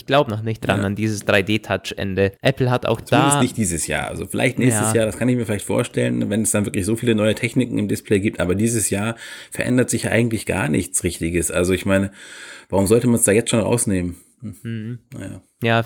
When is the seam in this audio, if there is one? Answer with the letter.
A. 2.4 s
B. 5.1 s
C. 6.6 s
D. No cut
A